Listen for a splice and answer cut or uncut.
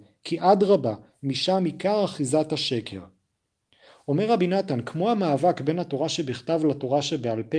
uncut